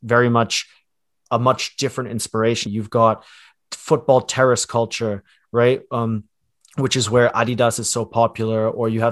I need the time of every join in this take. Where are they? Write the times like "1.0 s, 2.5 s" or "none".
2.7 s